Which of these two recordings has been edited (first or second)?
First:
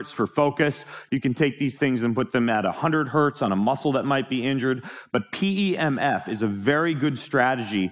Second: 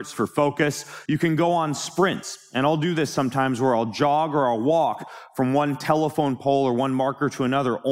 second